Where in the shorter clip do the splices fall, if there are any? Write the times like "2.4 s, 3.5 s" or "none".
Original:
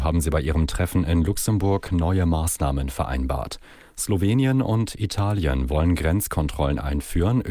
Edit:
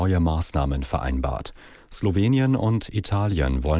none